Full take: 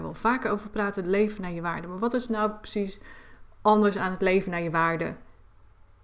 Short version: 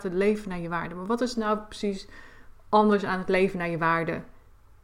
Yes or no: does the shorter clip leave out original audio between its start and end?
no